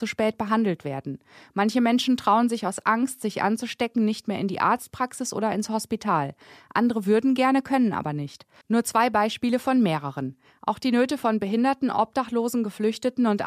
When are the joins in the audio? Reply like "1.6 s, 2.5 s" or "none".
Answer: 8.6 s